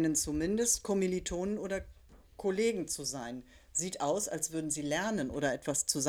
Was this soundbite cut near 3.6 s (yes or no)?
no